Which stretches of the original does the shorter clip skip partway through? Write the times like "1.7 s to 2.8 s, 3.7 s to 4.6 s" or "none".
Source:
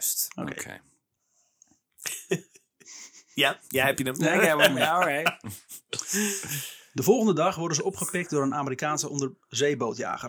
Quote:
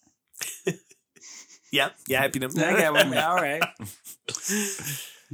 none